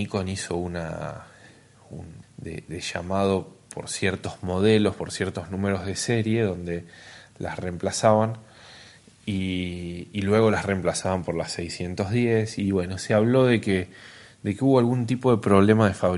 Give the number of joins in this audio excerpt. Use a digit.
1